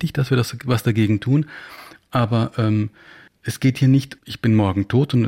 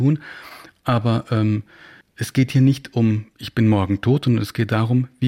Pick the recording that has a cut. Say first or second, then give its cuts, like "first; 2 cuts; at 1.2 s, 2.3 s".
first; 1 cut; at 4.2 s